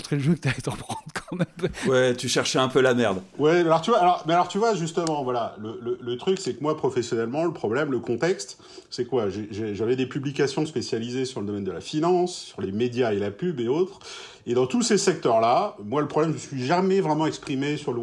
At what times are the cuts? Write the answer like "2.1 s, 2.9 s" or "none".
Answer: none